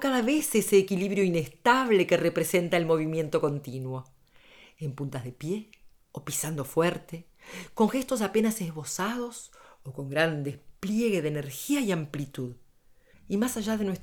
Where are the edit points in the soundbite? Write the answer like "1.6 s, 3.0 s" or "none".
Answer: 13.1 s